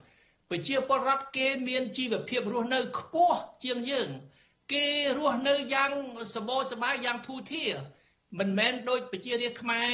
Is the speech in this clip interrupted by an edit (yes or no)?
no